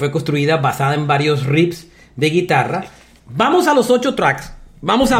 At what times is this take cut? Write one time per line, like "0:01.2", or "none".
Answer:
0:03.2